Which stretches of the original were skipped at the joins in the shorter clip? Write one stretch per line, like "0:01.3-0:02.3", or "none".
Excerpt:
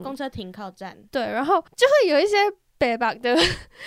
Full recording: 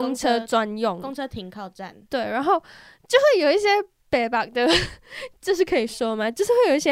0:02.7-0:03.0